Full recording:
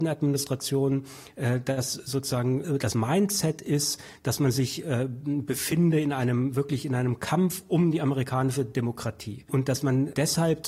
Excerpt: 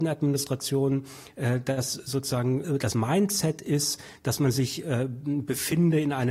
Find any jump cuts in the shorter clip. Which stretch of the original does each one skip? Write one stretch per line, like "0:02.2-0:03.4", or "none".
none